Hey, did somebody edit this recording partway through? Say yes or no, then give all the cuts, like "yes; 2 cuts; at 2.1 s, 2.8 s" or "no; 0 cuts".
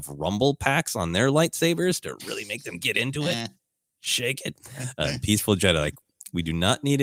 no; 0 cuts